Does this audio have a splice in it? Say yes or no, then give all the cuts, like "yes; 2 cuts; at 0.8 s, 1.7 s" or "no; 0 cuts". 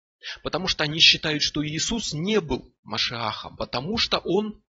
no; 0 cuts